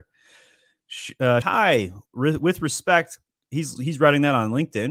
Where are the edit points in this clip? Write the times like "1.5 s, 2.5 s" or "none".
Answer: 1.4 s, 3.8 s